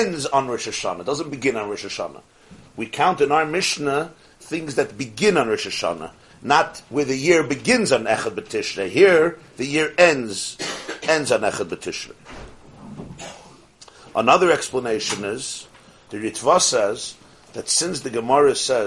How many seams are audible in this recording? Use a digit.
0